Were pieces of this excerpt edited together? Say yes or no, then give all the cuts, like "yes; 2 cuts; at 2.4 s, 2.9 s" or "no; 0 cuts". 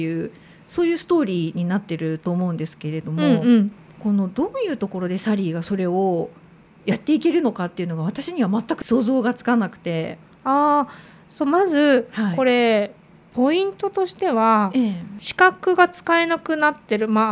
no; 0 cuts